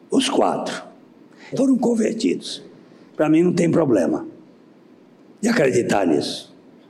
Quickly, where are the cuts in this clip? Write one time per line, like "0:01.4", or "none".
0:01.5